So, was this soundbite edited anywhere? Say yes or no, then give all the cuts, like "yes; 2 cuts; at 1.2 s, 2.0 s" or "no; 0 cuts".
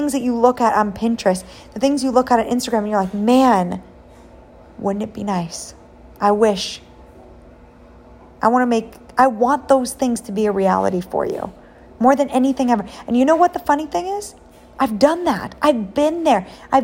no; 0 cuts